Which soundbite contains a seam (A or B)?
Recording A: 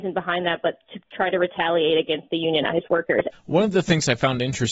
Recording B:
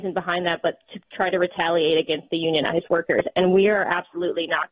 A